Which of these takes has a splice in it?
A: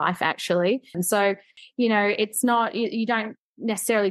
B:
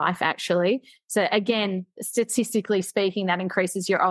A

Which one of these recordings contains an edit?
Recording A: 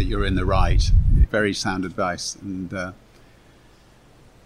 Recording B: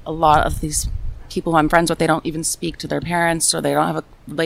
A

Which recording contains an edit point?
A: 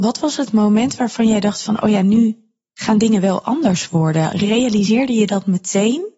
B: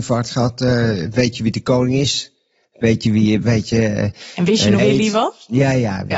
B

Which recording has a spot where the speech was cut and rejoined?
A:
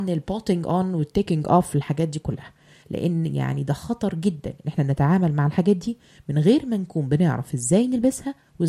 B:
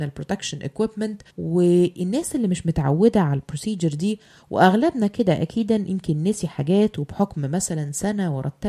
B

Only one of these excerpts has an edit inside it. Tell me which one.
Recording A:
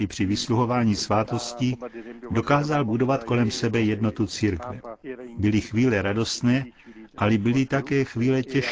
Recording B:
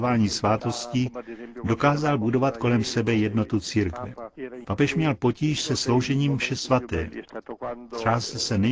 B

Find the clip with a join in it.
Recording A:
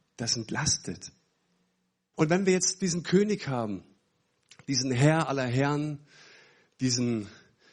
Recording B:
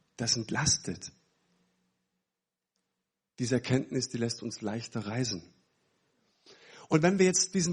A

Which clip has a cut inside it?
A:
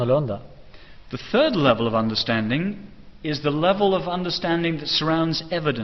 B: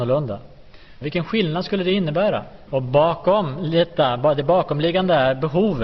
B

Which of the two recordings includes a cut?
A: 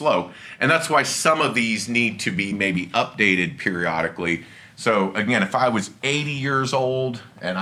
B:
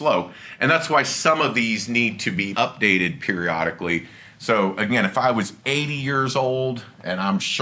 B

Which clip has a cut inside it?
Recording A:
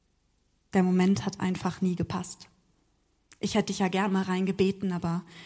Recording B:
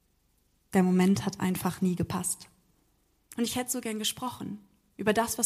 B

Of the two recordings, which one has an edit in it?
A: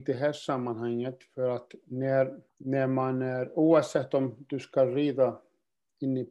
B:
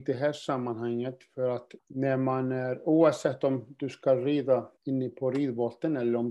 B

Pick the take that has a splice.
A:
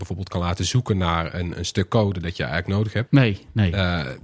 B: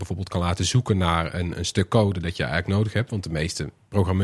A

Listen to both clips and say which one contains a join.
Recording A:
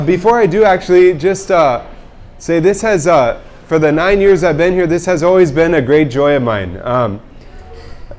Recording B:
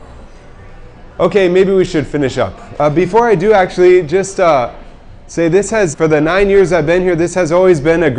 B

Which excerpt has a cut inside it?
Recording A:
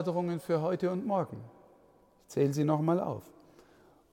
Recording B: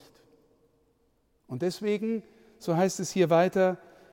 B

